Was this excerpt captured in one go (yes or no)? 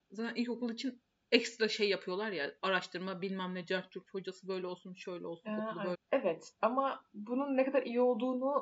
no